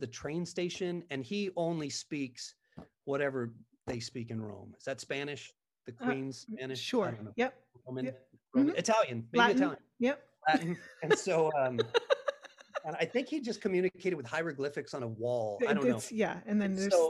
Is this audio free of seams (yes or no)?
yes